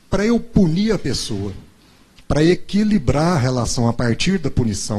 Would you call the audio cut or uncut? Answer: uncut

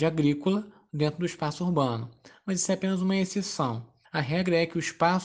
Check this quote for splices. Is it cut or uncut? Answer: cut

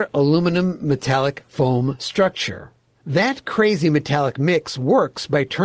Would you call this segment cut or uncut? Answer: uncut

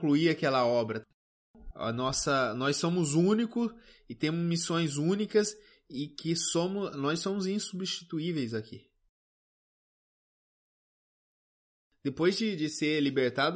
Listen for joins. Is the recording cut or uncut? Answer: cut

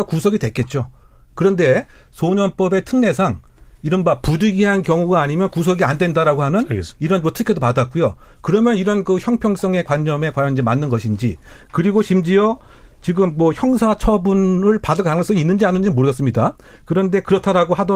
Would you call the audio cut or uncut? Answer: uncut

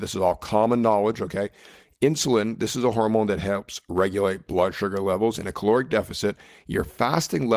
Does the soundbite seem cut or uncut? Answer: uncut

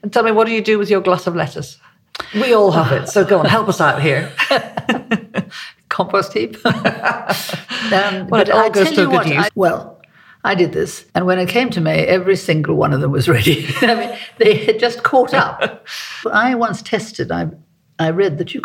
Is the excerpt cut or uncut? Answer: cut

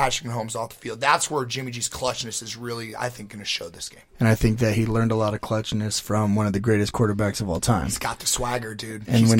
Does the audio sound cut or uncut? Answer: uncut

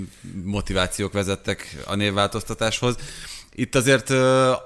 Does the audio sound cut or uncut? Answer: uncut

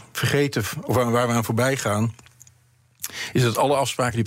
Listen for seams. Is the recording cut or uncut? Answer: uncut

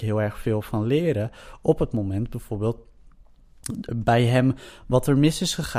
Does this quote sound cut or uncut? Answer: cut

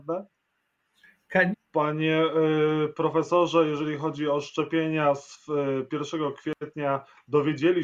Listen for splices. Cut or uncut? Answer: cut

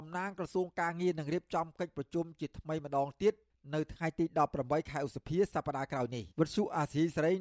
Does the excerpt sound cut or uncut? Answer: cut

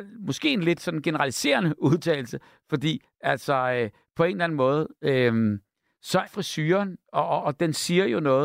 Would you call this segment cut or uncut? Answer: cut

